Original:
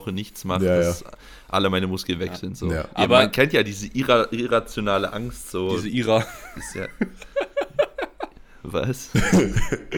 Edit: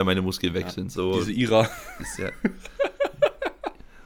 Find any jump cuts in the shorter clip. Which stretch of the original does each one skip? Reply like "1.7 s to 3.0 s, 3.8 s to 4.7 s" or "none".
2.6 s to 5.5 s